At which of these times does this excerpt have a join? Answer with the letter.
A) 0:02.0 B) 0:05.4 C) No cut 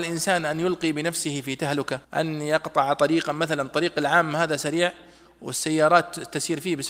A